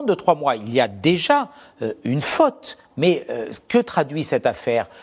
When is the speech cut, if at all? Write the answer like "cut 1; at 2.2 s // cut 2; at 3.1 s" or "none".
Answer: cut 1; at 2.9 s